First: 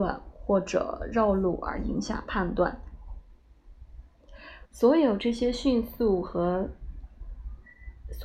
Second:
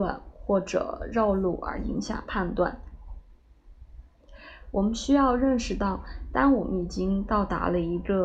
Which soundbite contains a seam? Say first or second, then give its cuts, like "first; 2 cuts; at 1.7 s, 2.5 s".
first; 1 cut; at 4.6 s